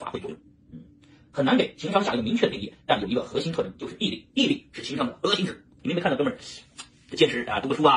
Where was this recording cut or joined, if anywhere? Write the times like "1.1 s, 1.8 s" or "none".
5.8 s